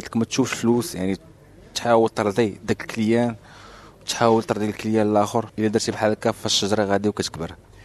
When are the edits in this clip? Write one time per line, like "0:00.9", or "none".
0:02.6